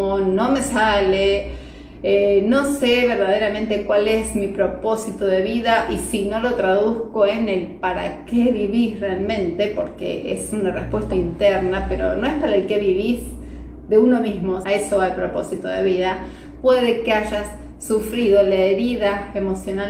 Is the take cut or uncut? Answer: cut